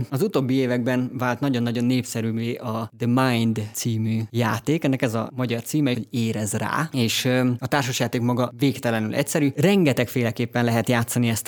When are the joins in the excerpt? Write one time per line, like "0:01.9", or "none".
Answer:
0:05.9
0:09.5